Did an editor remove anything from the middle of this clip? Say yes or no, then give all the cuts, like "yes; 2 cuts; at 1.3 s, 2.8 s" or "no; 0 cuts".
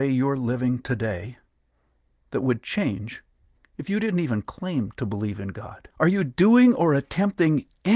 yes; 1 cut; at 5.9 s